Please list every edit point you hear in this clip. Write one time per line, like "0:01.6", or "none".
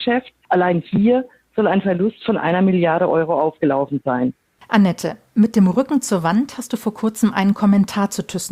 0:04.6